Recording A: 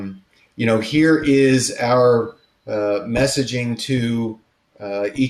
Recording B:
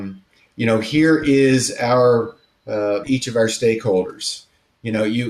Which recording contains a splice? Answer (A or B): B